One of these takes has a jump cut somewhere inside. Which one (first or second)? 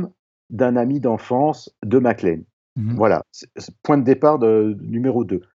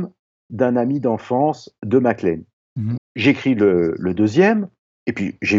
second